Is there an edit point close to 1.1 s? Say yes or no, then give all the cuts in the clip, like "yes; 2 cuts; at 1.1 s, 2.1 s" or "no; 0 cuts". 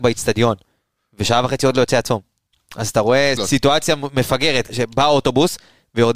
no; 2 cuts; at 3.4 s, 4.7 s